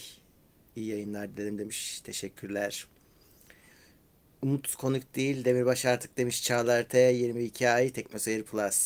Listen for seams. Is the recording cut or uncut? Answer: uncut